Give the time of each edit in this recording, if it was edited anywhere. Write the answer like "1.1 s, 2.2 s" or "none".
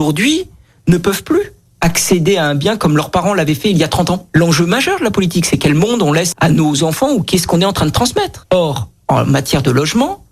4.3 s, 6.3 s